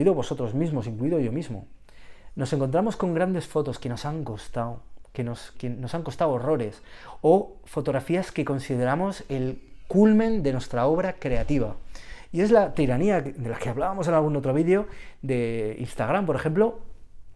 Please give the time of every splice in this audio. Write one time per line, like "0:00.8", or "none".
0:05.5
0:12.3